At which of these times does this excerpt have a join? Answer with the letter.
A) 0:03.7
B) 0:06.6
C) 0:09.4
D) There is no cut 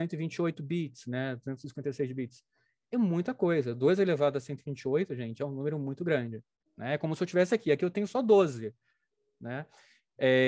B